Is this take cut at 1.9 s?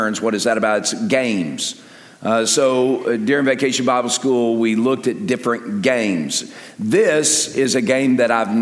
no; 0 cuts

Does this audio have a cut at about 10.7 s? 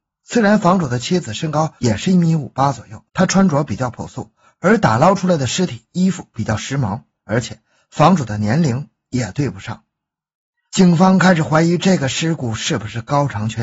yes; 2 cuts; at 3.1 s, 10.7 s

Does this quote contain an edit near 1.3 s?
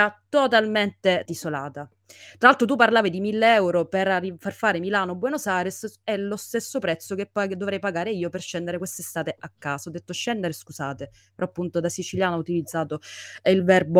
yes; 1 cut; at 1.3 s

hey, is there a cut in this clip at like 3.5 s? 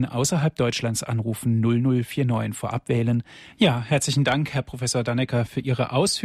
yes; 1 cut; at 3.5 s

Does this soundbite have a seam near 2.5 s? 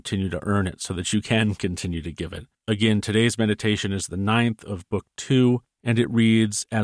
no; 0 cuts

